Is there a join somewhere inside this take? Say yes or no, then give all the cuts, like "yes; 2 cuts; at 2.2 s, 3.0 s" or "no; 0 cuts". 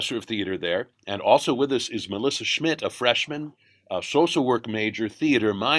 no; 0 cuts